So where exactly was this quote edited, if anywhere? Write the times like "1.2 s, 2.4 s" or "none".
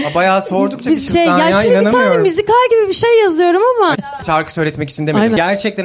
1.1 s, 3.9 s